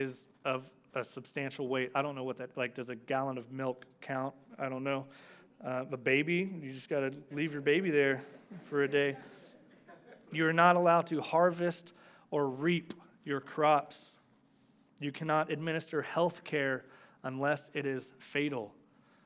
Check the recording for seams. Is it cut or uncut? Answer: uncut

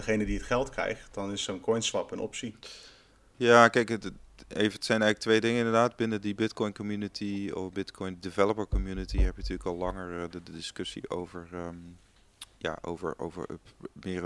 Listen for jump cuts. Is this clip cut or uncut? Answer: cut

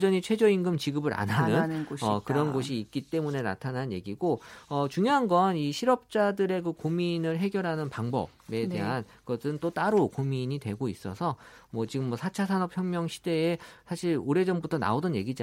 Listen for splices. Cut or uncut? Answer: uncut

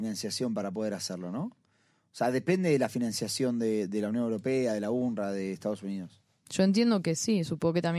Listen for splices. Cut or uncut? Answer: uncut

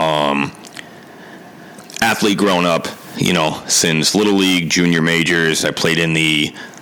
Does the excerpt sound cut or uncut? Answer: uncut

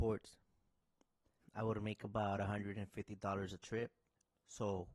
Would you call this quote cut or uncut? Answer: cut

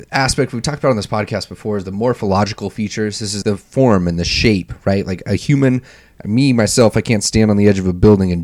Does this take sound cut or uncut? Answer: cut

